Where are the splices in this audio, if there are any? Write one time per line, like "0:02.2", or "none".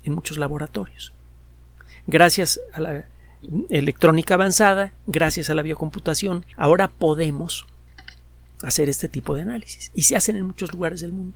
0:06.5